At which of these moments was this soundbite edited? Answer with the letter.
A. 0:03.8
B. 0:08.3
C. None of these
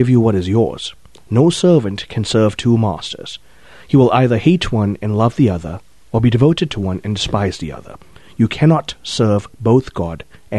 C